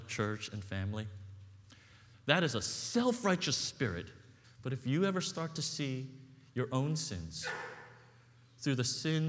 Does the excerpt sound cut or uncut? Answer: cut